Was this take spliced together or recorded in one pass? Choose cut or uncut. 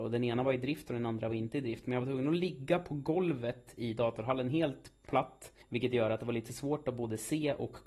cut